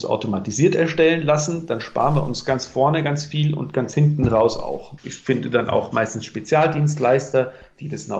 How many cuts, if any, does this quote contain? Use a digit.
1